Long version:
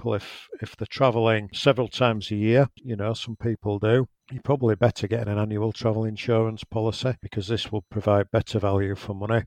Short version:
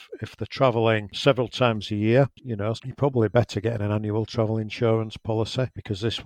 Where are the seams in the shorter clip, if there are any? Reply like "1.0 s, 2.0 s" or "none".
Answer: 2.8 s